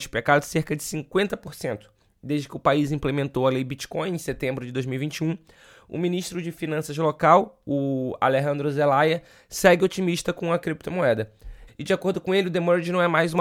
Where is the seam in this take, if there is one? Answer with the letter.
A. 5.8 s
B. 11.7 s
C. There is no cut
B